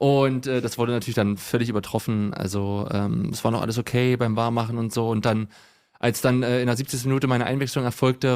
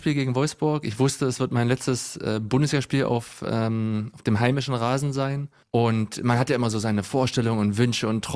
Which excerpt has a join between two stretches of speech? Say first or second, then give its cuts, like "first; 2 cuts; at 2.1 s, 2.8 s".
second; 1 cut; at 5.6 s